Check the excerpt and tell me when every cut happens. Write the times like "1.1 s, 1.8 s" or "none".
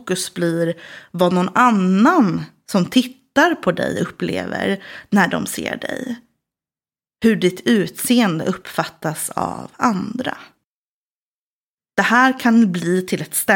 none